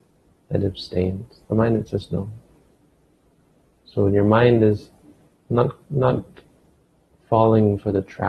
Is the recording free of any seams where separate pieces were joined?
yes; 0 cuts

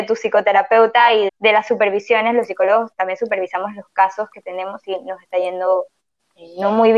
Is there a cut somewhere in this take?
yes; 1 cut; at 1.3 s

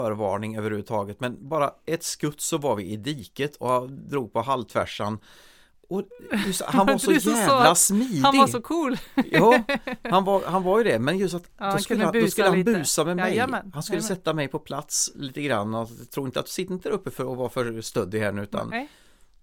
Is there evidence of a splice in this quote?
no; 0 cuts

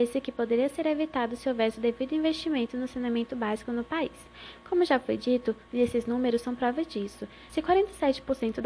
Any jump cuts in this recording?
yes; 2 cuts; at 5.7 s, 7.5 s

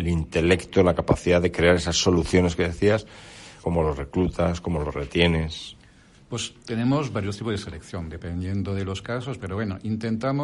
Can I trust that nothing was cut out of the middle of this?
no; 1 cut; at 3.6 s

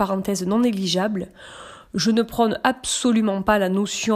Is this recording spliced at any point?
no; 0 cuts

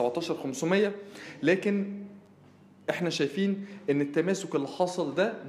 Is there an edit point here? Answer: no; 0 cuts

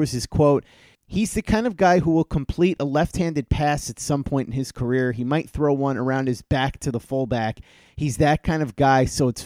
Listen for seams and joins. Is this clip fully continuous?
yes; 0 cuts

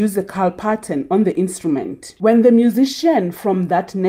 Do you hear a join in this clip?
yes; 1 cut; at 2.2 s

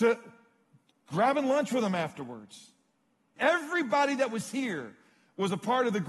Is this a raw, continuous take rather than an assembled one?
no; 1 cut; at 3.4 s

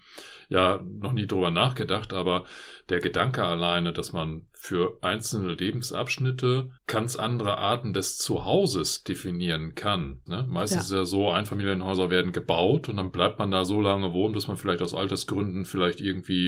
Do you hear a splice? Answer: yes; 2 cuts; at 6.8 s, 10.3 s

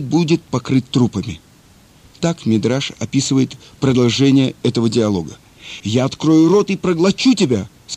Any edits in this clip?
yes; 2 cuts; at 2.2 s, 5.8 s

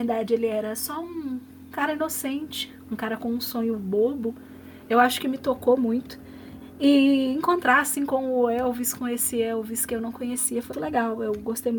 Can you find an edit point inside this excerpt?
yes; 1 cut; at 10.7 s

